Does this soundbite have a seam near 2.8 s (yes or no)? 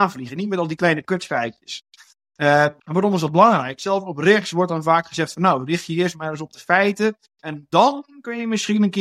yes